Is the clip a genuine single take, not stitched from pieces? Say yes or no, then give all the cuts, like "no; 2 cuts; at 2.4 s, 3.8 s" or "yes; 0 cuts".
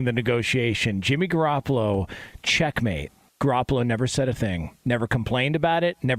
no; 1 cut; at 3.3 s